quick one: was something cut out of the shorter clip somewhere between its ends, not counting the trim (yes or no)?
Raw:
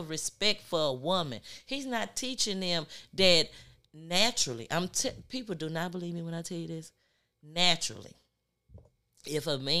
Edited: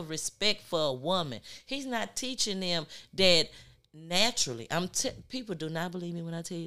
no